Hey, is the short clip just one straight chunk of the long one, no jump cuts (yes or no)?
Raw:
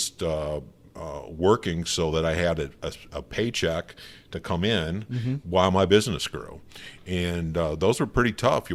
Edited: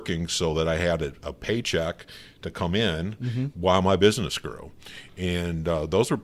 no